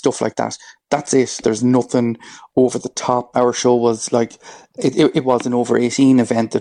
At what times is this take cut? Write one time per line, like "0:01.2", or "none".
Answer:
0:01.4
0:03.3